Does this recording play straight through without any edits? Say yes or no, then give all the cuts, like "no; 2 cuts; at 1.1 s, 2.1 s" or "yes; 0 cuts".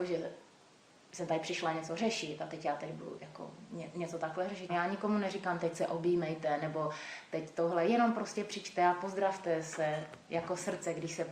no; 1 cut; at 4.7 s